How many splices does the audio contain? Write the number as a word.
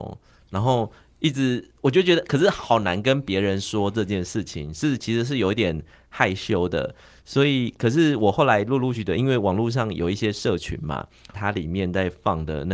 two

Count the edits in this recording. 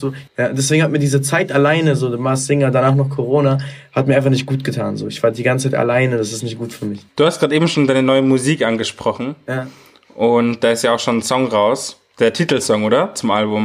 zero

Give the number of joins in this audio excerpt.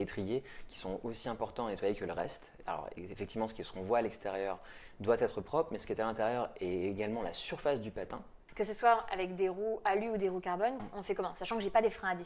two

